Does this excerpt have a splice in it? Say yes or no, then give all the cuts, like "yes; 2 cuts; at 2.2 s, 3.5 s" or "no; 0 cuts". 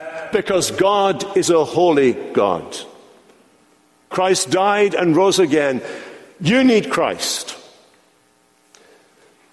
yes; 1 cut; at 4.1 s